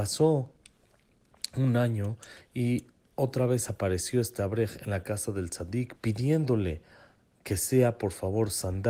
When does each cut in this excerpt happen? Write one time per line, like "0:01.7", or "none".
0:06.0